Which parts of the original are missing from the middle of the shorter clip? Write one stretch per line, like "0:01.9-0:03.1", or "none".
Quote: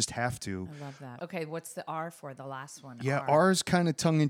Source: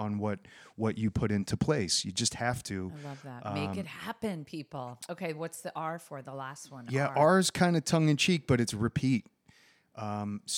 0:03.4-0:05.1